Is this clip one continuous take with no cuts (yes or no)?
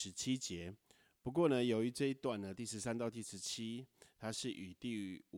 yes